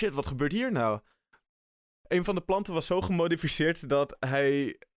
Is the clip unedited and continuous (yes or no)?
yes